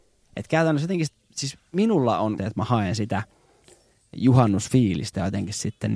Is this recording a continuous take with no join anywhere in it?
no; 1 cut; at 2.4 s

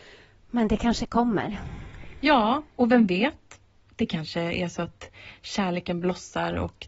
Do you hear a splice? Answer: no; 0 cuts

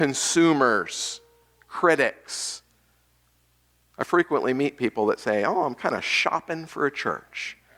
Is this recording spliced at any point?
no; 0 cuts

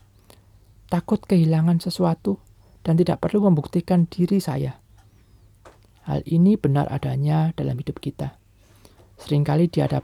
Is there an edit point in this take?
no; 0 cuts

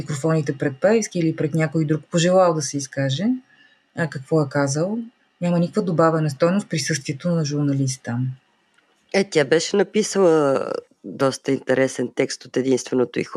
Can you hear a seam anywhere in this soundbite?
no; 0 cuts

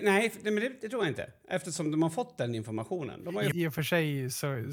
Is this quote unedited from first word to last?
no; 1 cut; at 3.5 s

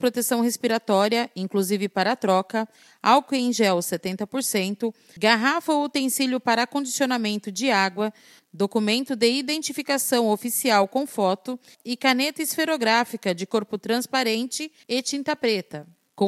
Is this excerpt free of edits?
yes; 0 cuts

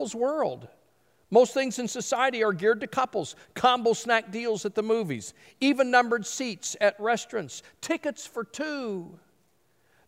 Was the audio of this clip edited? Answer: no; 0 cuts

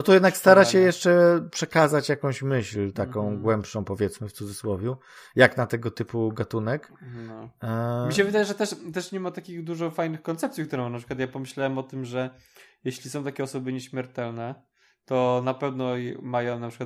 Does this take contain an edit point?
no; 0 cuts

